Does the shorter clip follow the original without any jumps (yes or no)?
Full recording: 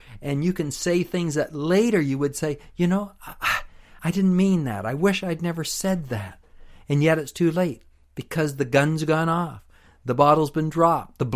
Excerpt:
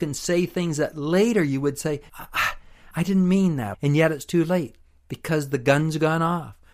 no